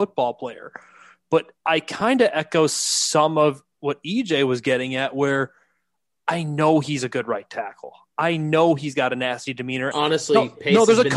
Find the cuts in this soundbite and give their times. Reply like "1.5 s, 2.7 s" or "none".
9.9 s